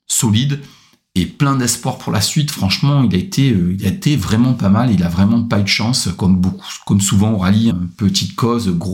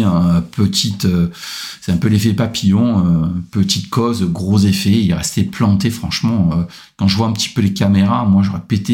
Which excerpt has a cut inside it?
first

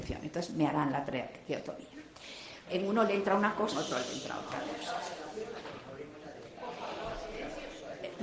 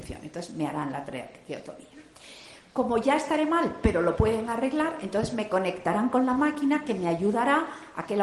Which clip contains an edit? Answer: first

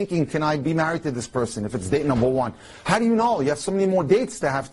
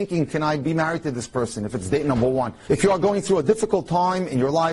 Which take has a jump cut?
second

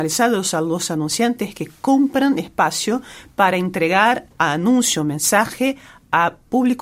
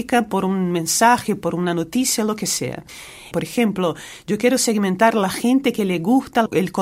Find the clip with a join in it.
second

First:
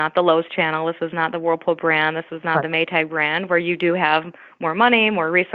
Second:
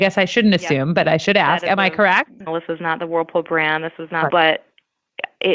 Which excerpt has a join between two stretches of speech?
second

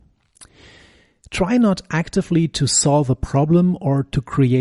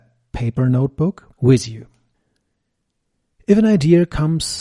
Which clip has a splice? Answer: second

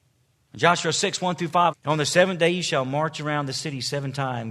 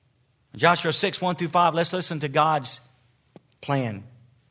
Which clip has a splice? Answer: first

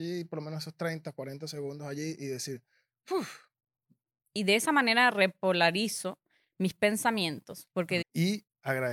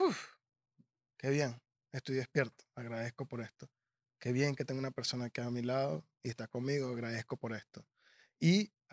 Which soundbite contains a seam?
first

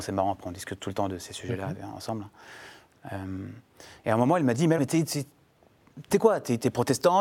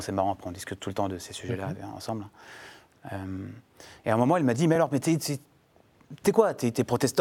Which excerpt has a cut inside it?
first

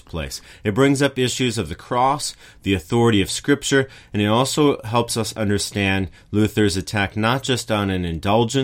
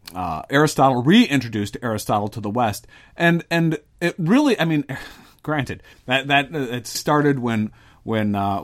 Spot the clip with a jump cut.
second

